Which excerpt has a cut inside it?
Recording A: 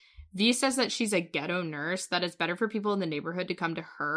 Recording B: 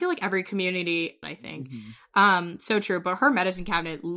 B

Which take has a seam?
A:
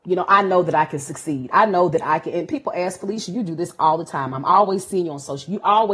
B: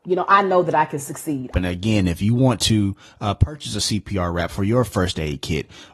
B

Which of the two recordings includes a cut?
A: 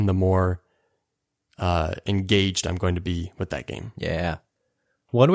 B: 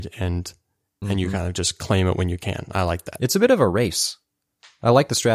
B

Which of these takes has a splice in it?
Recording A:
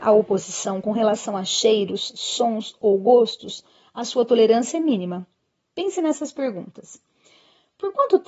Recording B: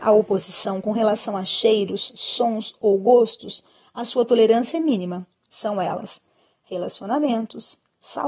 B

